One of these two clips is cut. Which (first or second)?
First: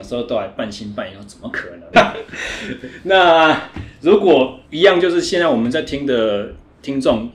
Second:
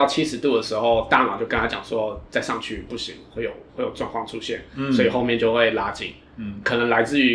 first